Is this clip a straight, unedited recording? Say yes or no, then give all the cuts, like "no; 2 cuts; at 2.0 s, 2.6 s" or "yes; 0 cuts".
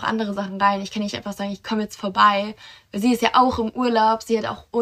yes; 0 cuts